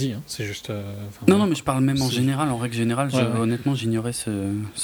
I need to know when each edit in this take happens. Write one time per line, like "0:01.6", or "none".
none